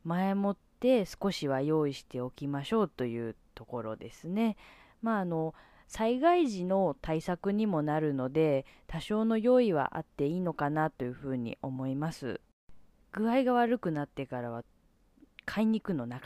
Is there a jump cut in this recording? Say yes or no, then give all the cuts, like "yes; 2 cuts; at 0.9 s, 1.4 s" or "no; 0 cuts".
yes; 1 cut; at 13.0 s